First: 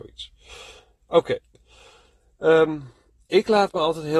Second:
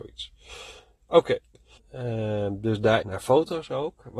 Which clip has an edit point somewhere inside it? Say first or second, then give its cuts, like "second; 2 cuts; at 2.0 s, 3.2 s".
second; 2 cuts; at 1.8 s, 3.0 s